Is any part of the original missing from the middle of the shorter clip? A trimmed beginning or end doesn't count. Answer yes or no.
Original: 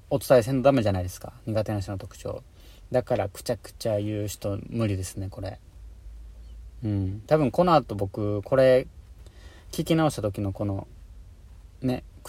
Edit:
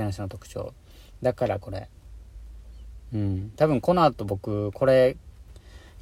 yes